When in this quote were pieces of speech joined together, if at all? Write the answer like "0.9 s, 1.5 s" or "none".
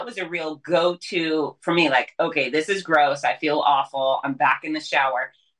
none

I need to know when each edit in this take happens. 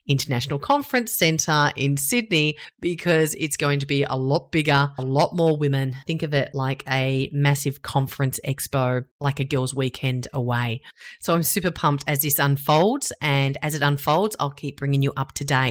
none

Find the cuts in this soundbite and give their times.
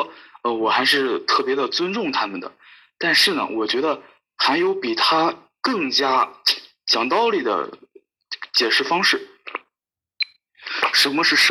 none

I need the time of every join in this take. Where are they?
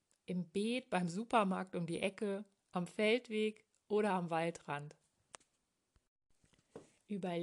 none

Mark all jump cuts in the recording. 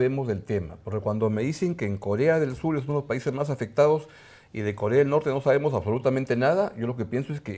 none

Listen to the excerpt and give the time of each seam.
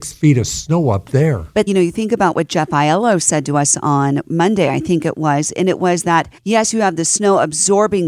1.7 s, 6.4 s

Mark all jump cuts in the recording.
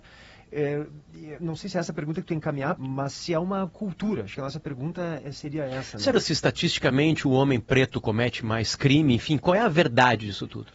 2.8 s, 6.1 s

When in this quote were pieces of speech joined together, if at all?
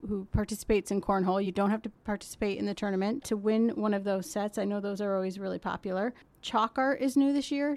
none

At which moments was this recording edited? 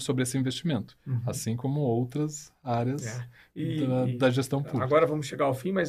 none

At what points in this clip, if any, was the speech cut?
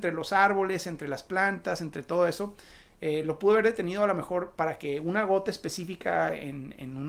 none

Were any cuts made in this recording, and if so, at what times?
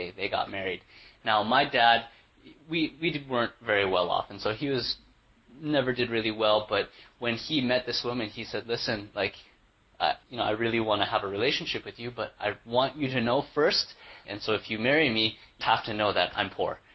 10.2 s, 14.2 s, 15.6 s

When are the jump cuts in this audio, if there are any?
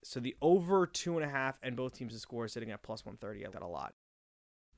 3.5 s

